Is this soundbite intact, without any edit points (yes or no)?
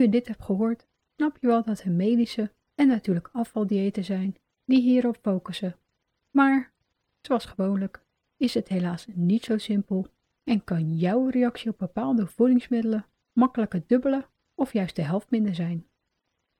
yes